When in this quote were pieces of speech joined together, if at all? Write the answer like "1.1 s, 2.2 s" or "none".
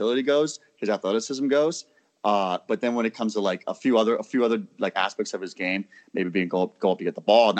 none